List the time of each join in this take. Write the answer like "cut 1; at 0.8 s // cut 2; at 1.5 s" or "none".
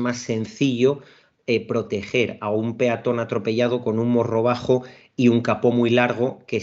none